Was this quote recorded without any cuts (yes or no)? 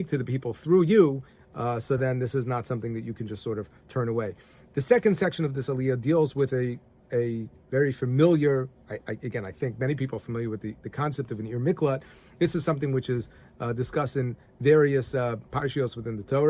yes